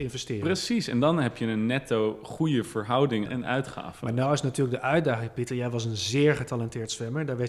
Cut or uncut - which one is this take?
cut